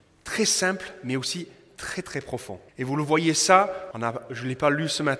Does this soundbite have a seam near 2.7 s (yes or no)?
yes